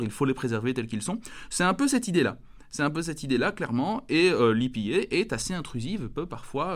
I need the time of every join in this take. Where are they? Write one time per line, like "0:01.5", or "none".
none